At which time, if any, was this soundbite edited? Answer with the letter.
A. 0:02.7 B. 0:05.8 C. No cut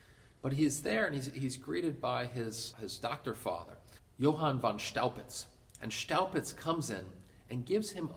A